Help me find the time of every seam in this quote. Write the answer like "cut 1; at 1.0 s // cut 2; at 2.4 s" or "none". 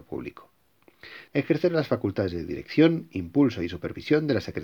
cut 1; at 1.3 s